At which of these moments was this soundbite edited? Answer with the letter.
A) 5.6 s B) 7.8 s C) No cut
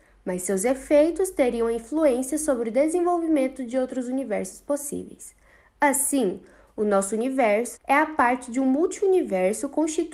B